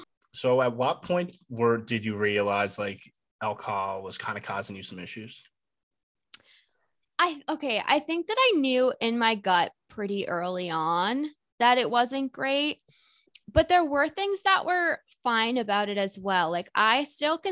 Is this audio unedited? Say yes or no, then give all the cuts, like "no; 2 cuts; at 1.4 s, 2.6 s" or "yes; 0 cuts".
yes; 0 cuts